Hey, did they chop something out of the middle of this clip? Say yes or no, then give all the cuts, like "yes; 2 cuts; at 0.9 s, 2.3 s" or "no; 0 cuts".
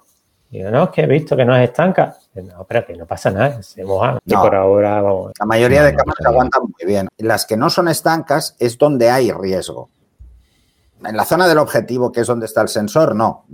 yes; 3 cuts; at 4.2 s, 5.3 s, 7.1 s